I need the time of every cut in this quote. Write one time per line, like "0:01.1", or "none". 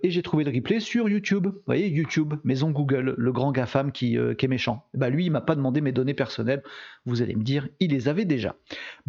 none